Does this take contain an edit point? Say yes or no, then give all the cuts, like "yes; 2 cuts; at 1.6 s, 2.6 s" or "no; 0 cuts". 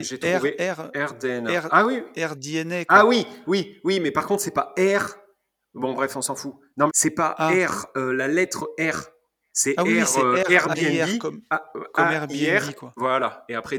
yes; 1 cut; at 6.9 s